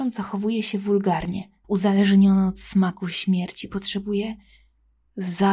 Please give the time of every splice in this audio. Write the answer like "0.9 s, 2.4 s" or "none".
1.6 s, 3.7 s